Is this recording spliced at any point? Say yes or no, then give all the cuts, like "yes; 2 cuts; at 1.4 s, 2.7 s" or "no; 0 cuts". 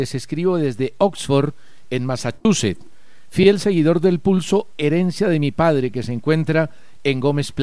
no; 0 cuts